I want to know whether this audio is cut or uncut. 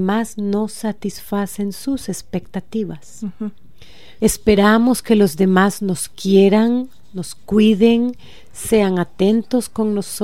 cut